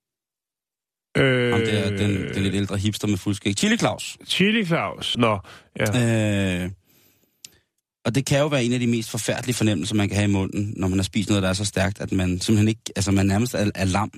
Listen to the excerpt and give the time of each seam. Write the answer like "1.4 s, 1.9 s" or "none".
5.1 s